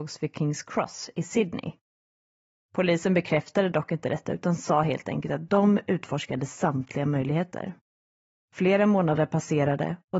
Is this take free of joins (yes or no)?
no